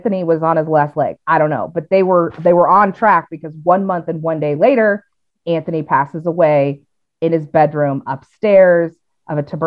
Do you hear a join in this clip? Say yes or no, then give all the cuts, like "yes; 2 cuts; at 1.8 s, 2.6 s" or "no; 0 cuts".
no; 0 cuts